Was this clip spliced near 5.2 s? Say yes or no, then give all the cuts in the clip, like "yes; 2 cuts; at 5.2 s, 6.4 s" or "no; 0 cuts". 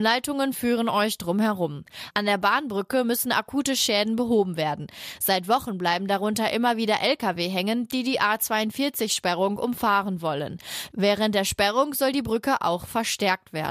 no; 0 cuts